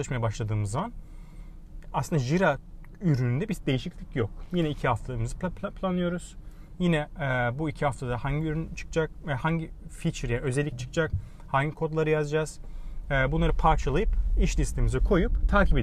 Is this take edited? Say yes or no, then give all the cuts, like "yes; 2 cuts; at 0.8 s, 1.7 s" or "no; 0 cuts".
no; 0 cuts